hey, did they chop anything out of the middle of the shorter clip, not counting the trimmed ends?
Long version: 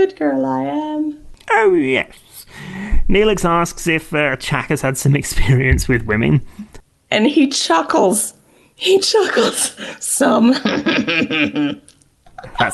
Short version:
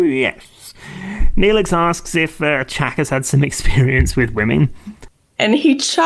no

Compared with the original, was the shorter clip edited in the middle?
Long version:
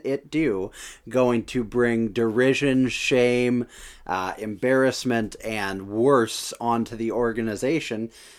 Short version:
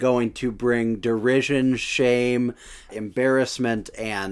yes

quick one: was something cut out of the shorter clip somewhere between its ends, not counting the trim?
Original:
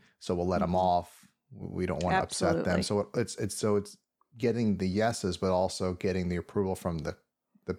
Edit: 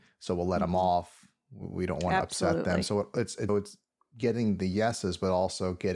yes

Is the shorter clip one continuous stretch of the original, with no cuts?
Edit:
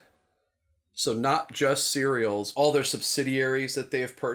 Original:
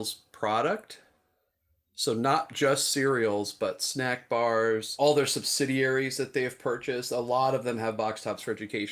no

